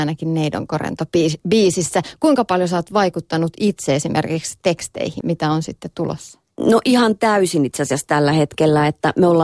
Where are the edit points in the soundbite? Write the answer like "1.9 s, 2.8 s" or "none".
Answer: 5.2 s